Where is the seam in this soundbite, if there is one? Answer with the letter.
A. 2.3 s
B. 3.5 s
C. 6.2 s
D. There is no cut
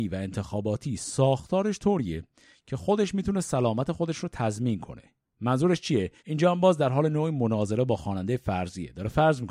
C